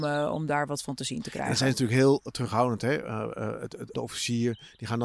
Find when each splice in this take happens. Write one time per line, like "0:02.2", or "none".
0:03.9